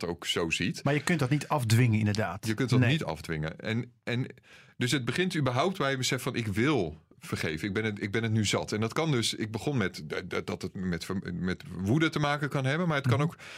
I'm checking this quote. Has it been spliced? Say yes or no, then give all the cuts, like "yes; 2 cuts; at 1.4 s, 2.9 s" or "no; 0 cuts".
no; 0 cuts